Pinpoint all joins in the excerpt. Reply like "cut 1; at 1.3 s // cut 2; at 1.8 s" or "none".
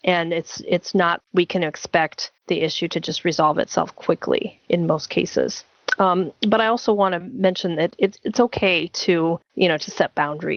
cut 1; at 1.2 s